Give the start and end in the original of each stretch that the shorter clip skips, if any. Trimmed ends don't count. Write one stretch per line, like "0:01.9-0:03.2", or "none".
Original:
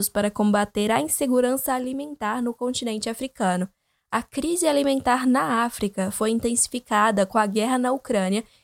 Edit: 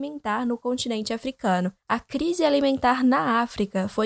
0:03.7-0:04.0